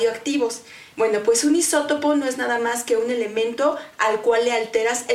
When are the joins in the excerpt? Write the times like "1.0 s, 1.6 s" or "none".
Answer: 0.9 s